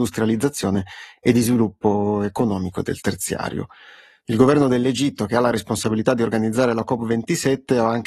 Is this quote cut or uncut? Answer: uncut